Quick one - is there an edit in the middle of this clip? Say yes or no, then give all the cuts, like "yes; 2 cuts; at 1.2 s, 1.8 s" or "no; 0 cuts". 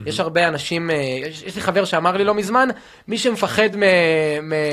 no; 0 cuts